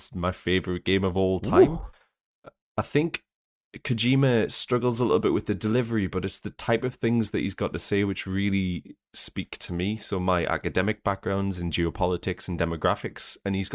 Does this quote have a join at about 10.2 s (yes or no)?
no